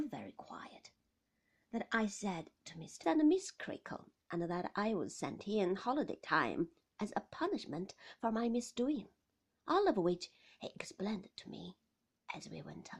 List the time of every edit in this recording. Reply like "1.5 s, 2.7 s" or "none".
3.0 s